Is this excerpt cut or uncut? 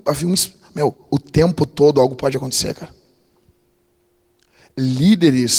uncut